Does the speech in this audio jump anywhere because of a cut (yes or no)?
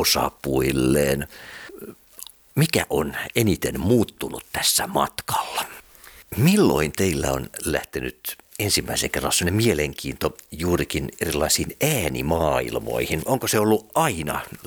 yes